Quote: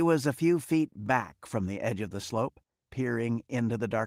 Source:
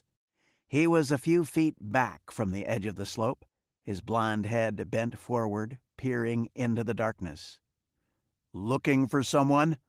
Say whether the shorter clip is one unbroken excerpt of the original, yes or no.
no